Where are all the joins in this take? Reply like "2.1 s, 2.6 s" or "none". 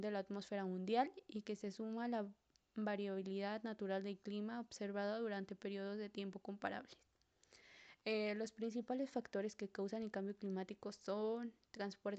none

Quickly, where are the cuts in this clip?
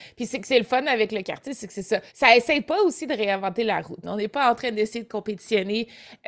2.1 s, 4.0 s

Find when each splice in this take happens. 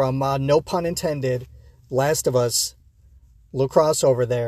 none

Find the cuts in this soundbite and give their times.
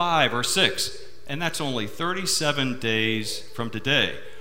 1.3 s

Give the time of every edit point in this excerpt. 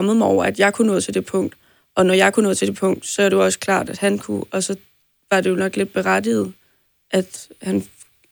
none

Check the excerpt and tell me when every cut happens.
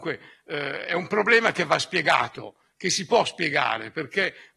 none

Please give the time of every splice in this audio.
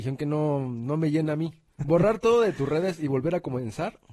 1.8 s

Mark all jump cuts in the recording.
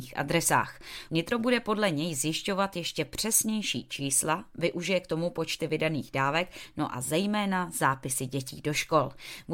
1.1 s

